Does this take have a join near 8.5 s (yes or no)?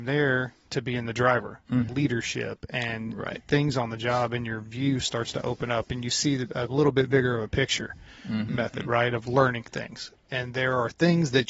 yes